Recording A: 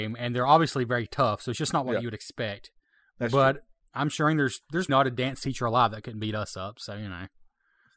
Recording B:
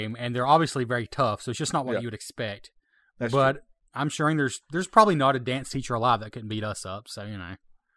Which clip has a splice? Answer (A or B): A